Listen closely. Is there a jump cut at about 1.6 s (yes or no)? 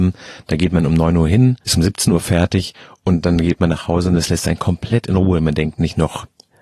yes